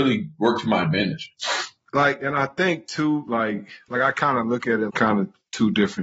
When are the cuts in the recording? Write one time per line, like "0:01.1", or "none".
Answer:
0:04.9